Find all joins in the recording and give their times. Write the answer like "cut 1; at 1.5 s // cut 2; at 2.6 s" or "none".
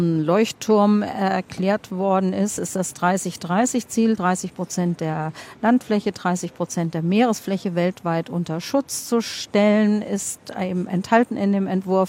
none